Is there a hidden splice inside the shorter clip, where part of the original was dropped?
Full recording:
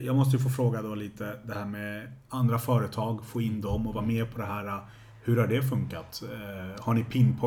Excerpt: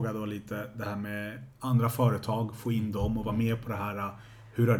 no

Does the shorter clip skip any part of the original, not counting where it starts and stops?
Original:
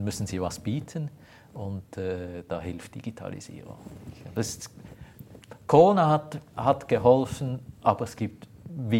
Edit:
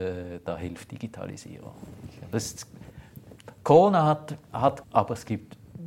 yes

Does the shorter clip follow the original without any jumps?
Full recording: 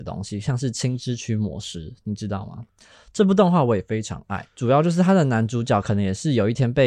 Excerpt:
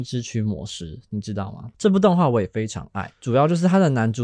no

